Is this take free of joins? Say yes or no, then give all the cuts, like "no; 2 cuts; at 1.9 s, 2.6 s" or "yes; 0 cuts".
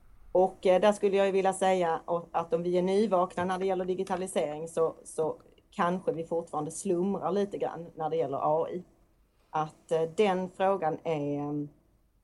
yes; 0 cuts